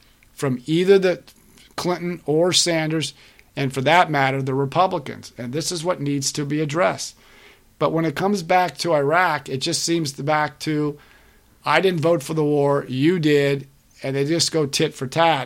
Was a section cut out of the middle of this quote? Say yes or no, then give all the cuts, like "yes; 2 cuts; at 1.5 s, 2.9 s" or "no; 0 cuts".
no; 0 cuts